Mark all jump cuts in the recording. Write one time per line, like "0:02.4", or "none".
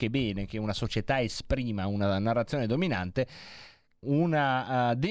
0:04.0